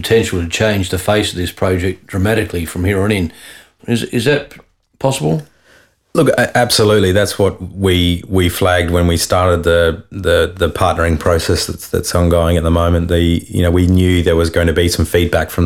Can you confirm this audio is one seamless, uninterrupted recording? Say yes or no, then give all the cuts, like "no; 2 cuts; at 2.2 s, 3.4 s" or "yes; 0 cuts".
no; 1 cut; at 3.8 s